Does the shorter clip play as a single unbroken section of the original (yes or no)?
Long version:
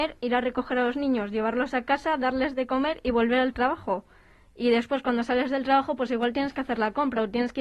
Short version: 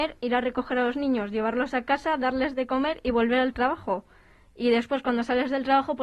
yes